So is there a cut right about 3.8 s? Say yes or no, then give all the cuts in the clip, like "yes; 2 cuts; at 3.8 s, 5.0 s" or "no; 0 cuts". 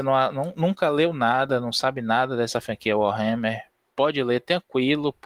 no; 0 cuts